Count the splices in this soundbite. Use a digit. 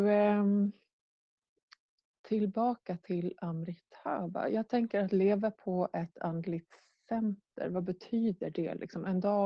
0